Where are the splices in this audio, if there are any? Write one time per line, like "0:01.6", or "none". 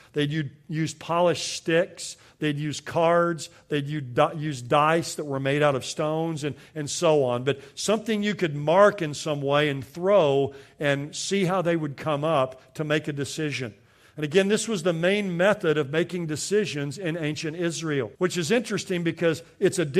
0:18.1